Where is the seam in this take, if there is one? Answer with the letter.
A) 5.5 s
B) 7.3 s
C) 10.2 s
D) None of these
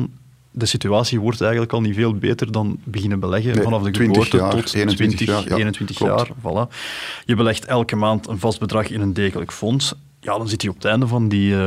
D